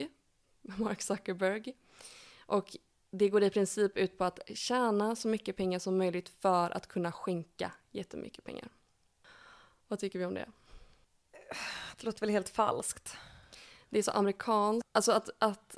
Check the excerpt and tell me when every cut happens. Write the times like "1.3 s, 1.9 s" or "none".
14.8 s